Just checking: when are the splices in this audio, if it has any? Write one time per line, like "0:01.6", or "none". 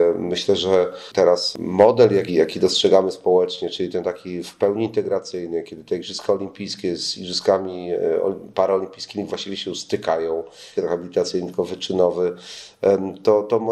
0:02.3
0:10.8